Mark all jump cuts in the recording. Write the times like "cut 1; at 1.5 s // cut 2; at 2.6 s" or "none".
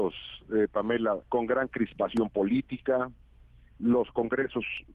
cut 1; at 1.2 s